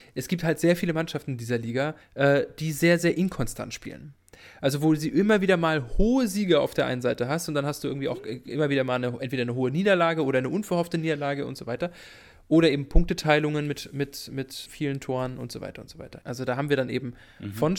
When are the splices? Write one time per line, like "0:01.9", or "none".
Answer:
0:02.0
0:14.7
0:16.2